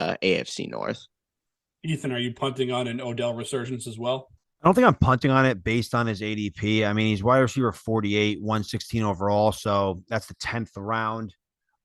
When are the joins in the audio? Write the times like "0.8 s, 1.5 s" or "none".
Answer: none